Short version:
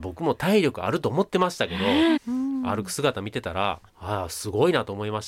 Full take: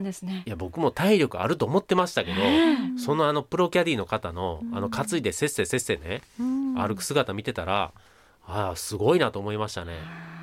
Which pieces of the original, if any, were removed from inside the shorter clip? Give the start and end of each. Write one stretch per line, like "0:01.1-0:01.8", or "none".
0:02.7-0:06.3
0:08.0-0:08.3